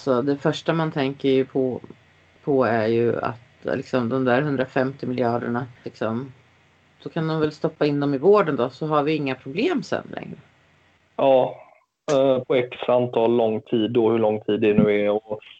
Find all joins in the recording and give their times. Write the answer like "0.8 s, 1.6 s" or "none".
5.8 s, 10.9 s